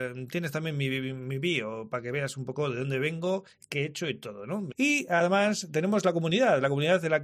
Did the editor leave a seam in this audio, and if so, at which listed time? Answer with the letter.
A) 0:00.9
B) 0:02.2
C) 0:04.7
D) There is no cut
C